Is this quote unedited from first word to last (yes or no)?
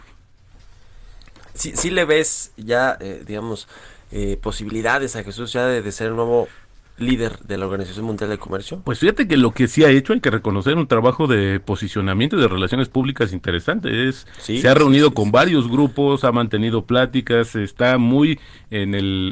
no